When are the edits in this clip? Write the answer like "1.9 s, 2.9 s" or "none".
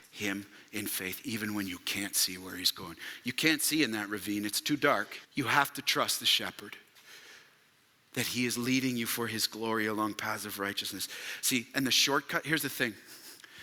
5.2 s